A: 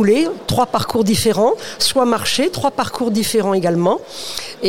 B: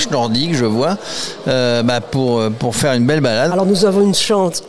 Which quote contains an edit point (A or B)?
B